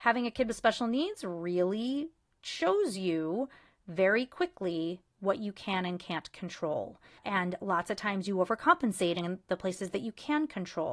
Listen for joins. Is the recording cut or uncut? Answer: uncut